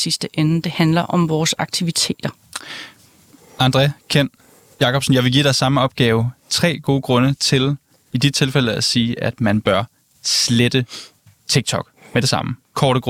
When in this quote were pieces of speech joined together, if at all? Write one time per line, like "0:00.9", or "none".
none